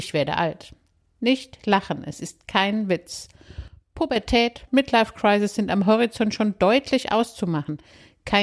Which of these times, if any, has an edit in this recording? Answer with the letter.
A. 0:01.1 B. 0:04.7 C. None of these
B